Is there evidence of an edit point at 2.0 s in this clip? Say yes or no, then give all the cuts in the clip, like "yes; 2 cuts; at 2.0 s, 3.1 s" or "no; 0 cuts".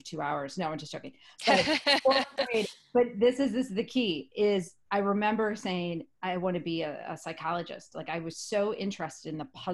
no; 0 cuts